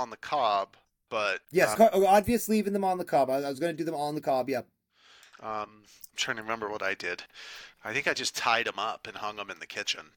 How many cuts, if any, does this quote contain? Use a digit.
1